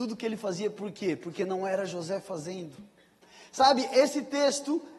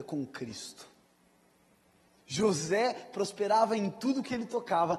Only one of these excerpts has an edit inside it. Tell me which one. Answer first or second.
second